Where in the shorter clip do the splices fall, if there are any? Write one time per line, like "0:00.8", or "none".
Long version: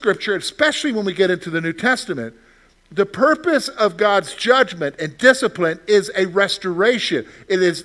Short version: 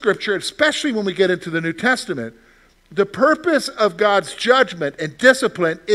none

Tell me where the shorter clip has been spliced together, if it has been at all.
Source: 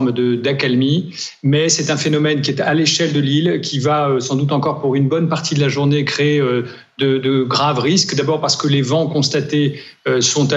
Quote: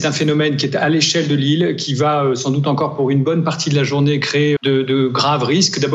0:04.6

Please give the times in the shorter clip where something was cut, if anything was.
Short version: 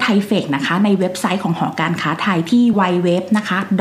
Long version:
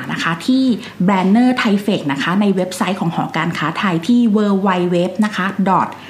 0:02.7

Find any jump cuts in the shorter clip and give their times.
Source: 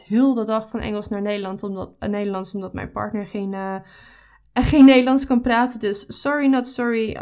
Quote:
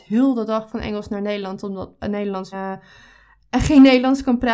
0:02.5

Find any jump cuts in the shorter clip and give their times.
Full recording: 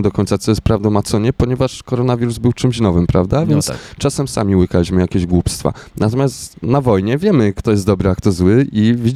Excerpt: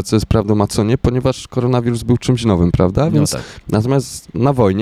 0:03.6

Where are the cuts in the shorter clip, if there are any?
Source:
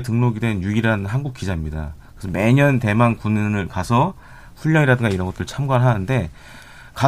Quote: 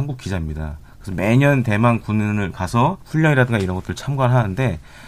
0:03.0

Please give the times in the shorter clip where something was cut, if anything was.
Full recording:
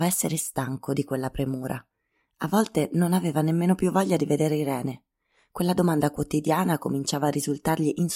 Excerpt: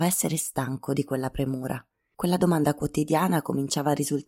0:02.1

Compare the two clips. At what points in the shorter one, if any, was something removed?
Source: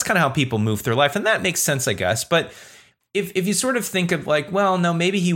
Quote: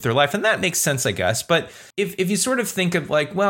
0:01.9

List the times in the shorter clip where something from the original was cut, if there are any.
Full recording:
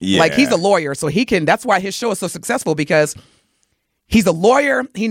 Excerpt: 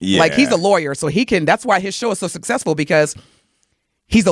none

